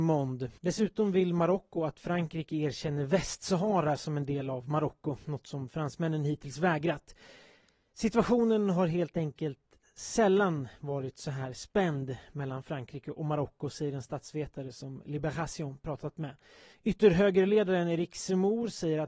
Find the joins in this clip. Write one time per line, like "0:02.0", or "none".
0:16.7

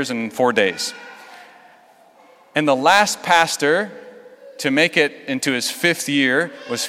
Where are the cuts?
none

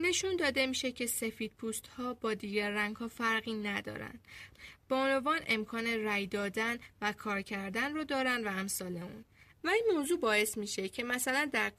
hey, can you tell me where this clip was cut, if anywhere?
0:09.6

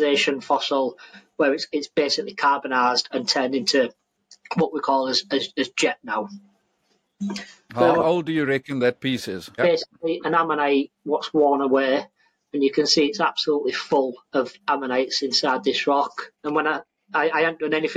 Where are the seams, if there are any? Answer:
0:09.6
0:14.2
0:16.3

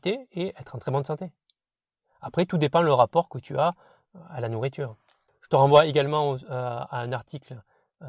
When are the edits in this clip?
0:05.3

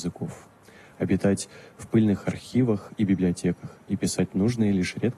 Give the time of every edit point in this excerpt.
none

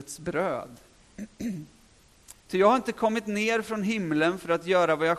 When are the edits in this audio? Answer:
0:02.3

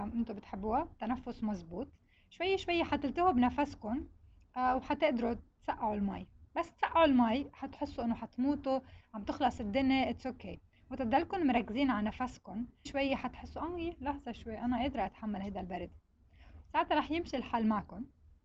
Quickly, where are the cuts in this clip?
0:12.9

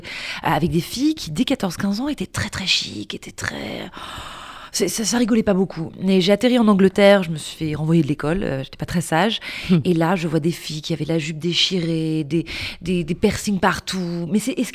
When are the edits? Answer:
none

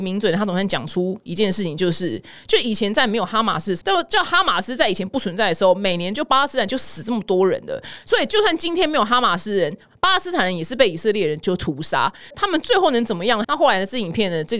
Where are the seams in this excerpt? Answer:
0:03.8
0:12.3
0:13.4

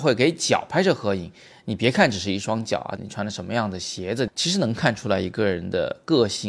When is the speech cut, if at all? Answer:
0:03.0
0:04.3

